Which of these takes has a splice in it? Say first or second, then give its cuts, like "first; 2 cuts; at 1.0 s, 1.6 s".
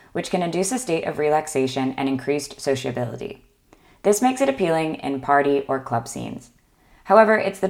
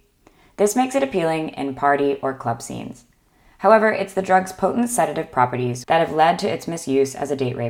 second; 1 cut; at 5.8 s